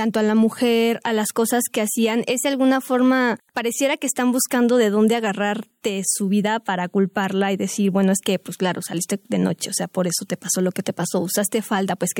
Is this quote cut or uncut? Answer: uncut